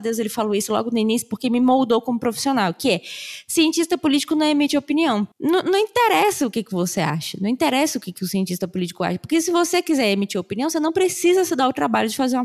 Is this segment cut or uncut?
cut